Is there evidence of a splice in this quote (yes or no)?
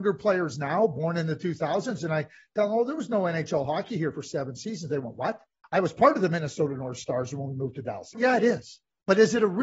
yes